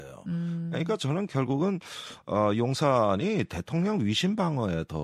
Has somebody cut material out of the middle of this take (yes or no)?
no